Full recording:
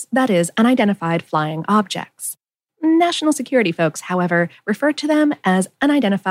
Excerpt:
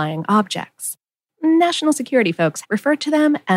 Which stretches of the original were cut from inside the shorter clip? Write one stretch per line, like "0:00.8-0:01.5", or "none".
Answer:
0:04.0-0:04.6